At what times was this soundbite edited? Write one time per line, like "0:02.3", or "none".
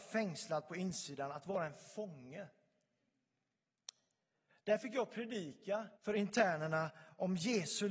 0:04.5
0:06.0

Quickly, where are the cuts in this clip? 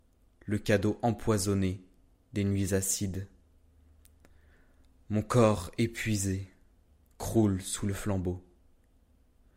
none

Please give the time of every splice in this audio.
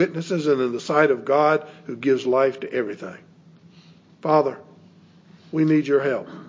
none

